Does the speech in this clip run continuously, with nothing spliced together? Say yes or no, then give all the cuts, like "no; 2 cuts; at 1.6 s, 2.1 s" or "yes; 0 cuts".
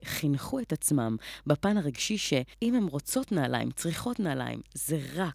no; 1 cut; at 2.5 s